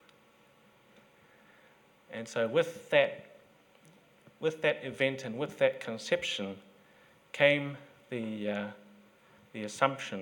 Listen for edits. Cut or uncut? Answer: uncut